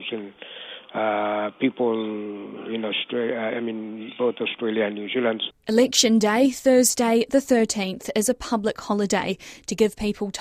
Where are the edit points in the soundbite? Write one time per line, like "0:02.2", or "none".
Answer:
0:05.5